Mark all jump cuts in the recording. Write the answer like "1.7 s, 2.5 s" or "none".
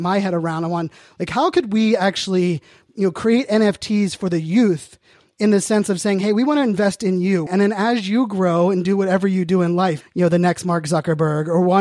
7.5 s, 10.0 s